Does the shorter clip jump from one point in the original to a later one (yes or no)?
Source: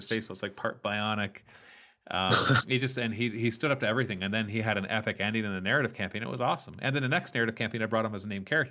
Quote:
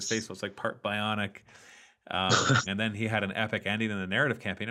yes